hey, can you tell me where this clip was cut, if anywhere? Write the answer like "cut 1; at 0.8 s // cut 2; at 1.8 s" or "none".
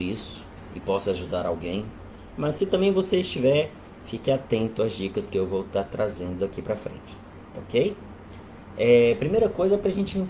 none